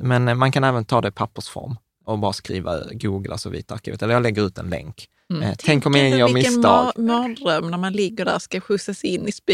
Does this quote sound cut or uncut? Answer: cut